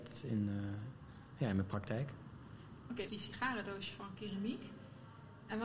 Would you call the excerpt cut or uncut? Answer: cut